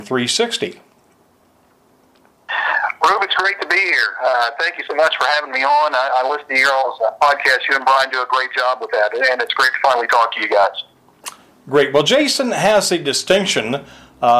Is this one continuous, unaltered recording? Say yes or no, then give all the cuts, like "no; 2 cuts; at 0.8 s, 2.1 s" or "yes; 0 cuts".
yes; 0 cuts